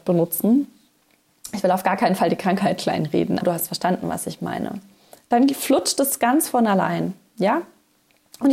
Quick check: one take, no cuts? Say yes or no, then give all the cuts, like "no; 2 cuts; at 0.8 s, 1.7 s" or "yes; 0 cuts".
no; 2 cuts; at 3.4 s, 5.3 s